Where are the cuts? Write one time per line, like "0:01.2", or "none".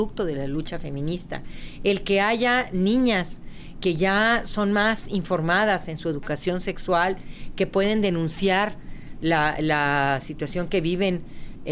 none